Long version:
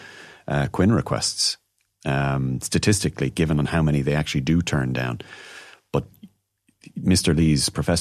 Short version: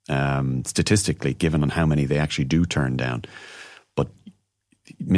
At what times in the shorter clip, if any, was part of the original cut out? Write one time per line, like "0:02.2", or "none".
none